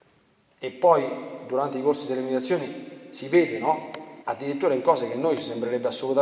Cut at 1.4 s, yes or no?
no